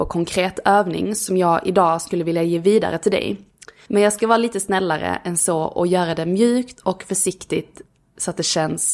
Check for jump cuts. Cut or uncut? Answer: cut